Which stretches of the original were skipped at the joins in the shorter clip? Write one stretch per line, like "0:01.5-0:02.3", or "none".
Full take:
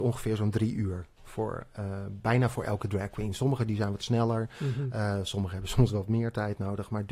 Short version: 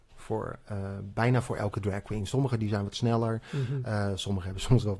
none